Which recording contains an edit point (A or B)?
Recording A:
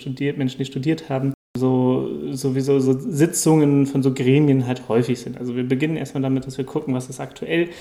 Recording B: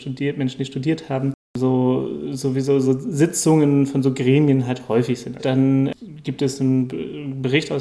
B